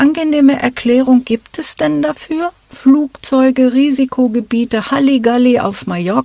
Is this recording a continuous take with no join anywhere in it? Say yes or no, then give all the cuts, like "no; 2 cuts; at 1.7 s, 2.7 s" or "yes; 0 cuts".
yes; 0 cuts